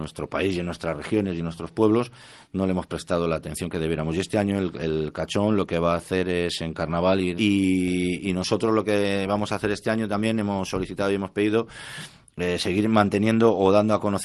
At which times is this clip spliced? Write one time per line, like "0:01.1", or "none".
0:07.4

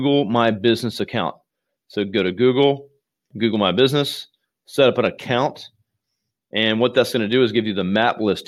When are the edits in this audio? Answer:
none

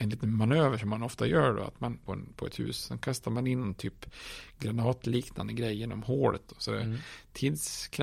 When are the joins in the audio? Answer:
0:02.1
0:06.5

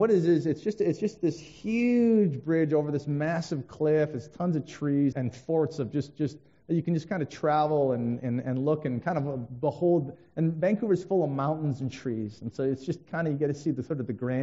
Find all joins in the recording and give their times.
0:05.1

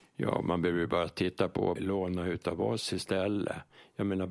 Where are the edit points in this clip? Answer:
0:01.8

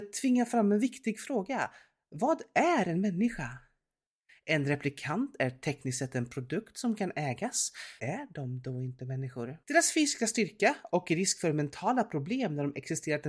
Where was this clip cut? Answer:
0:08.0
0:09.6

